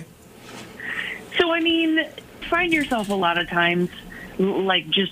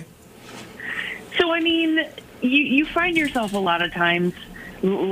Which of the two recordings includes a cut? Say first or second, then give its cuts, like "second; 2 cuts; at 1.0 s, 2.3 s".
first; 1 cut; at 2.4 s